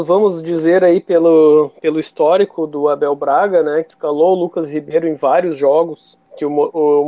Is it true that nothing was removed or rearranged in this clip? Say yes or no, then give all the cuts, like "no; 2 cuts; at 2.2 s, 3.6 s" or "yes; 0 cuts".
yes; 0 cuts